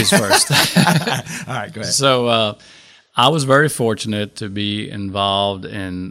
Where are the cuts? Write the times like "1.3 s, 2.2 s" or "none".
none